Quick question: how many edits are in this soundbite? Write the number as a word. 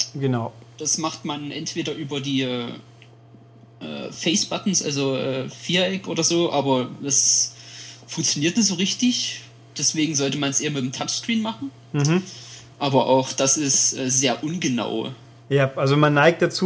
zero